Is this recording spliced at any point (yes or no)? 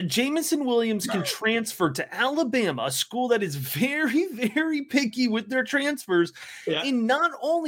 no